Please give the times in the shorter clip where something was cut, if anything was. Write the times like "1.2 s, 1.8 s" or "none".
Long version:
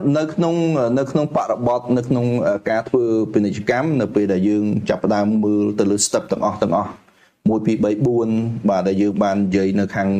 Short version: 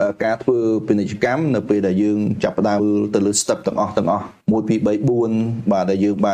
2.8 s, 4.4 s